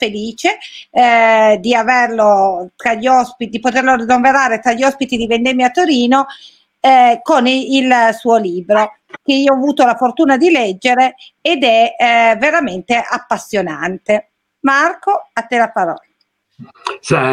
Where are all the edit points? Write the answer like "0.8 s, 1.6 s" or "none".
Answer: none